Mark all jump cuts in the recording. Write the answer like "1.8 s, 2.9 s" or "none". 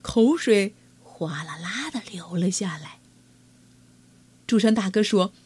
4.3 s